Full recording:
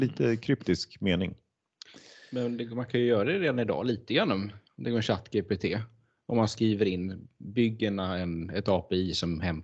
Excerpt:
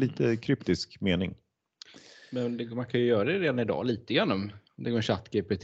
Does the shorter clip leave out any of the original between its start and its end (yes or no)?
no